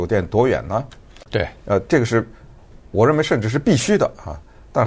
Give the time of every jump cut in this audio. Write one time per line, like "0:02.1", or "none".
0:01.3